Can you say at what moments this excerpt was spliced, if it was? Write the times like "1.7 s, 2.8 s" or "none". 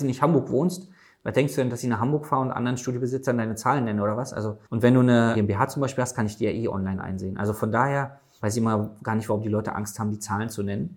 4.7 s